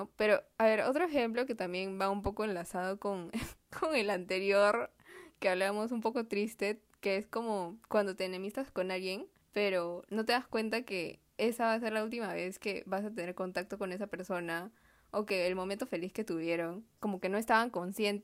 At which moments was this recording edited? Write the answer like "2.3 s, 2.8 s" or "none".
none